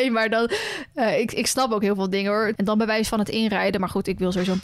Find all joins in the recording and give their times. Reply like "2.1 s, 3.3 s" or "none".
2.5 s